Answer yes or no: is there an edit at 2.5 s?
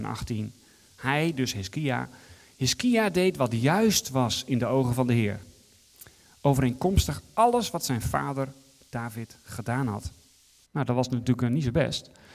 no